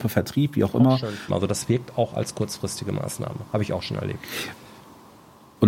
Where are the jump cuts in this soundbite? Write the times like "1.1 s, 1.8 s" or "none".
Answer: 1.3 s